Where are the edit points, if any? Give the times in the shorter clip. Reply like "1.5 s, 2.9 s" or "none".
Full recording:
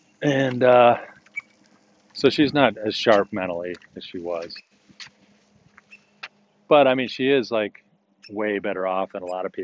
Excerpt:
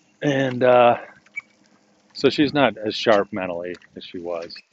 none